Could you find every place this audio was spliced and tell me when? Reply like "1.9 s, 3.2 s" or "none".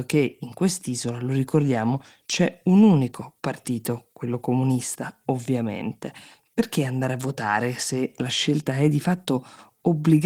none